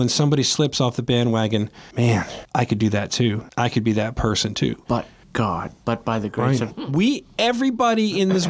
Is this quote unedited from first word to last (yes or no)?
no